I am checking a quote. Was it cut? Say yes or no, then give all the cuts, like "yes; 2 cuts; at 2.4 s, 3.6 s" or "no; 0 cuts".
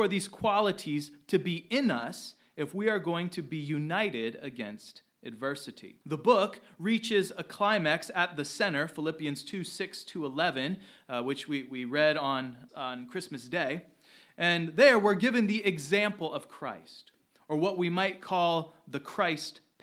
yes; 2 cuts; at 6.0 s, 12.7 s